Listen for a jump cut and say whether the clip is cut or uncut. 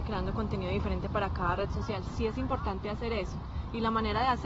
uncut